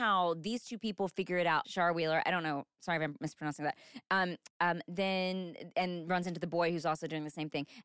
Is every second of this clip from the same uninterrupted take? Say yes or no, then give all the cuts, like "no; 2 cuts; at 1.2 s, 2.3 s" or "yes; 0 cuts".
no; 2 cuts; at 1.6 s, 4.5 s